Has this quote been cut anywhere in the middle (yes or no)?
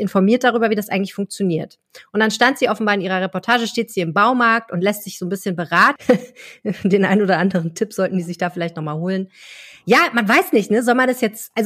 yes